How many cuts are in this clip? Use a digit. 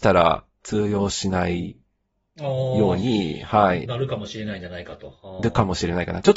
0